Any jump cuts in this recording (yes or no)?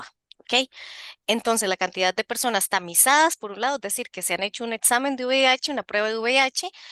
no